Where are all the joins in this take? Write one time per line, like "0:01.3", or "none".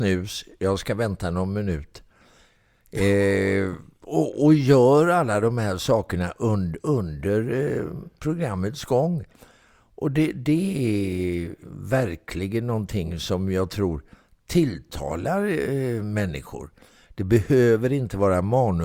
0:17.1

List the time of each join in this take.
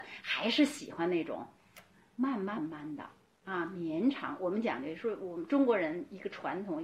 0:02.6

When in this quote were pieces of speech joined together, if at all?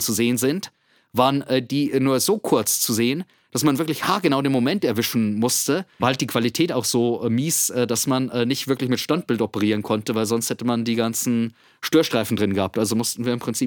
0:06.0

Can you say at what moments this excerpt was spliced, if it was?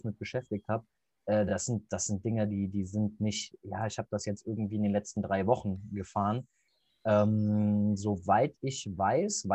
none

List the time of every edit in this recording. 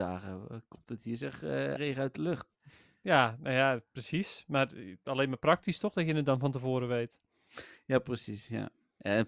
0:01.8

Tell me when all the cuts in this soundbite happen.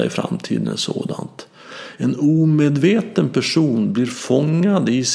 none

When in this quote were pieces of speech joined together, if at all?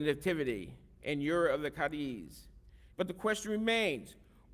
0:02.9

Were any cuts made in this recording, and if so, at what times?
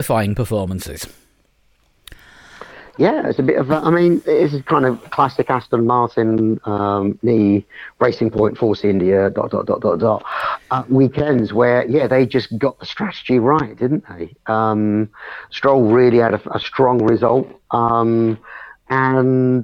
none

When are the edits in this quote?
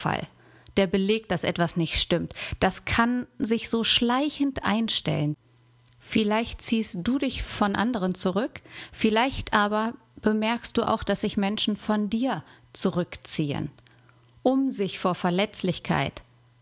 none

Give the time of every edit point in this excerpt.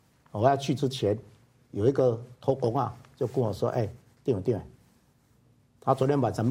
none

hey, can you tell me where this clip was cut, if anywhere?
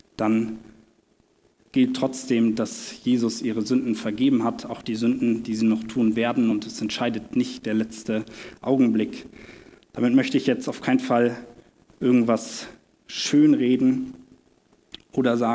none

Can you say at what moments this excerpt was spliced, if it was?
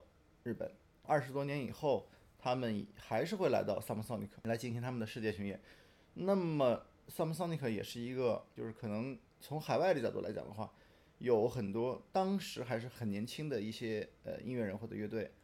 0:08.6

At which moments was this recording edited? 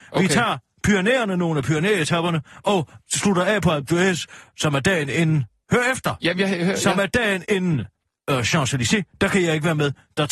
none

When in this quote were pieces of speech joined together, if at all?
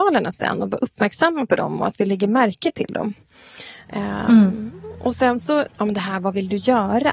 0:05.7

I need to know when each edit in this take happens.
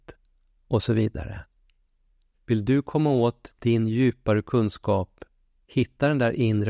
0:02.3

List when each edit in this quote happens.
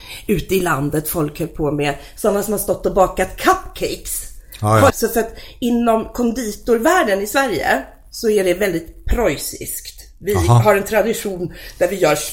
0:04.9

